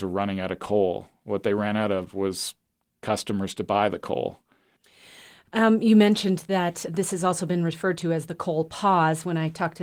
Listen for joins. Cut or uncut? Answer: cut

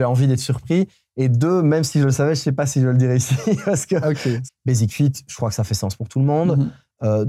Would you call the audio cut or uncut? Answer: cut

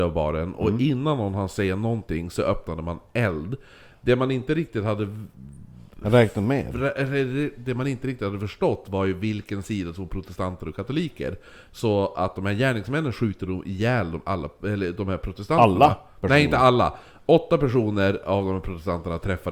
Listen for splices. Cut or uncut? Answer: uncut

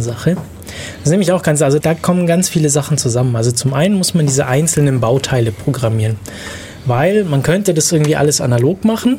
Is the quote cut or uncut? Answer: cut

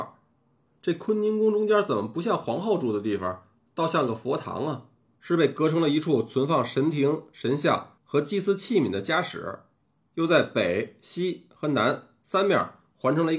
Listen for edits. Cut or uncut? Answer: cut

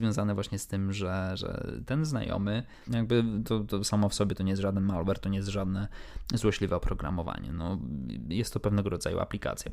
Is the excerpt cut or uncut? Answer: cut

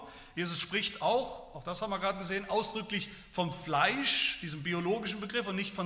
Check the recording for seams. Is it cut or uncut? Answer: uncut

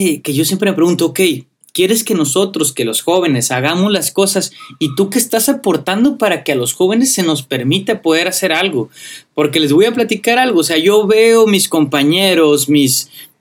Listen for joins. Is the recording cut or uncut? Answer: uncut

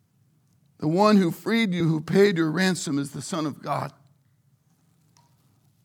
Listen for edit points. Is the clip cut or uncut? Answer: uncut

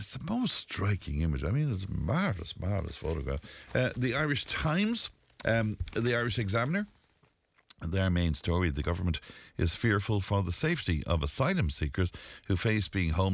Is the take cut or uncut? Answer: cut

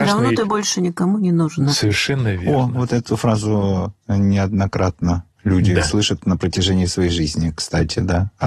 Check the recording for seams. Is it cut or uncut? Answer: uncut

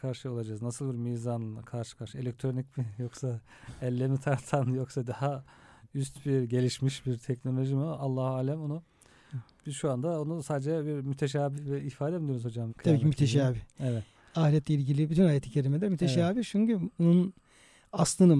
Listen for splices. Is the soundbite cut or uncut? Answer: cut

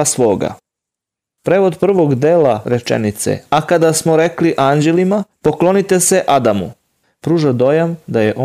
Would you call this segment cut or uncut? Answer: cut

